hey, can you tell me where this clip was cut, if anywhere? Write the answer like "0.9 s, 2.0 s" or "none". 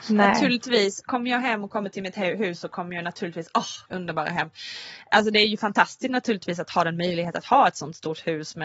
3.9 s